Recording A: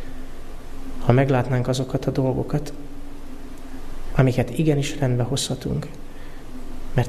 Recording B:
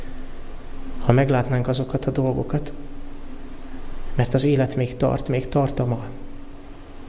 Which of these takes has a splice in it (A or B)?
B